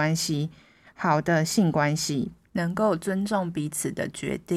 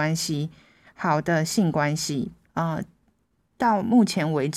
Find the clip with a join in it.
second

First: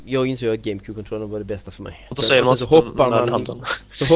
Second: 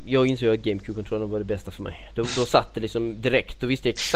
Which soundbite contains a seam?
first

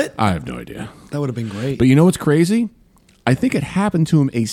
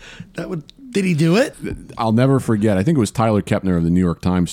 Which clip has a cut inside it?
second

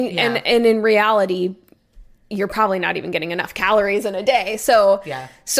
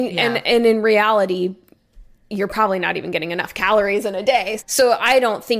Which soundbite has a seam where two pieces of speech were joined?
second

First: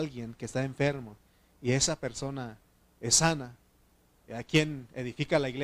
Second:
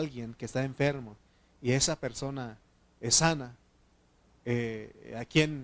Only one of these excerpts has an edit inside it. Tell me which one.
first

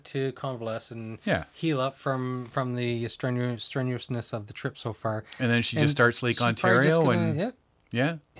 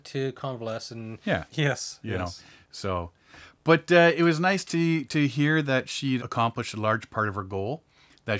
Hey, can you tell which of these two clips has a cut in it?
second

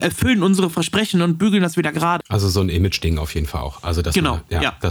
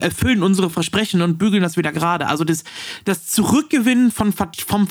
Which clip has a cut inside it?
first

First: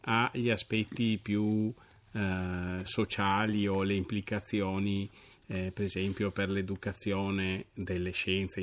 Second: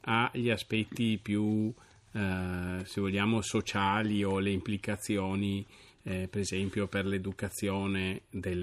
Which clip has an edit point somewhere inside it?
first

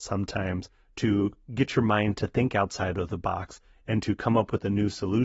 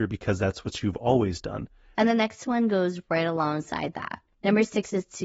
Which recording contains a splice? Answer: second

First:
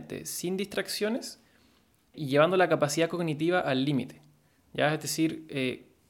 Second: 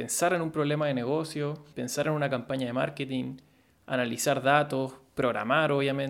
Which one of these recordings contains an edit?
second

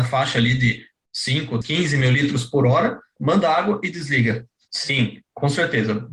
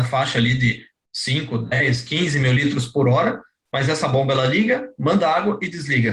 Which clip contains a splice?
first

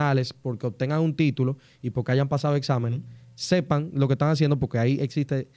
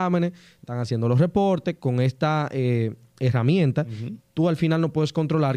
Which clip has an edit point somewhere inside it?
second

